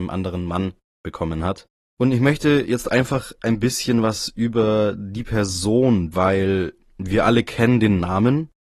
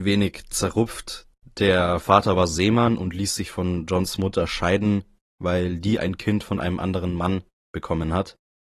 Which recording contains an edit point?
first; 2 cuts; at 1.9 s, 6.1 s

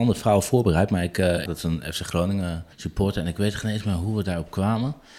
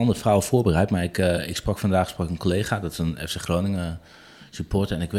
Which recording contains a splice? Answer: first; 2 cuts; at 1.5 s, 2.7 s

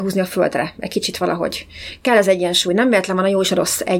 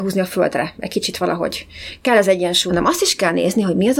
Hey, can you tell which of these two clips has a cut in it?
second; 1 cut; at 2.7 s

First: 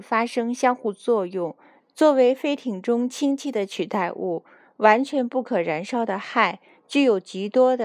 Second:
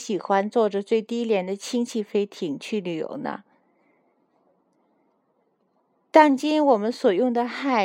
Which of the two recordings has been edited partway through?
first; 1 cut; at 1.8 s

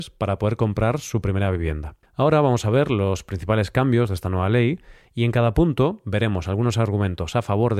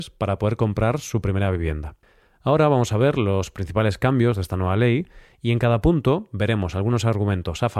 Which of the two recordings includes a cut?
first; 1 cut; at 2.1 s

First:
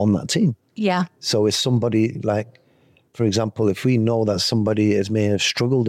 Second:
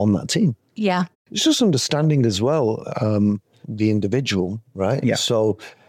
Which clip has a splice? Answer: second; 2 cuts; at 1.1 s, 3.6 s

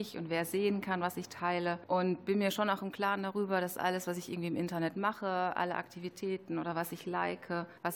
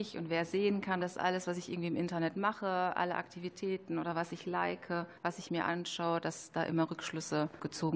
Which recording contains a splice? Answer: second; 1 cut; at 1.0 s

